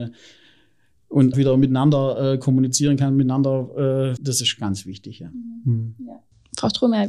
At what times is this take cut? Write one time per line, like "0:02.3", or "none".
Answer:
0:01.3
0:04.2